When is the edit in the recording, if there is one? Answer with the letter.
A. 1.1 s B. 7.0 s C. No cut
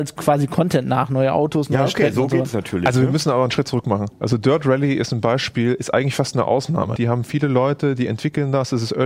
B